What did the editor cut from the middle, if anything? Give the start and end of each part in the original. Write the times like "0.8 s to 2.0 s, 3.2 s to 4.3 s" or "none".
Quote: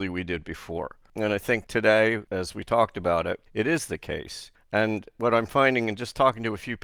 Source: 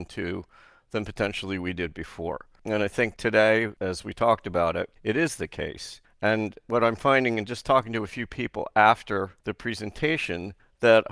none